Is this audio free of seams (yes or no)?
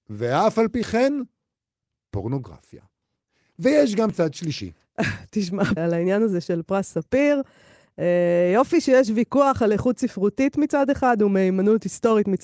no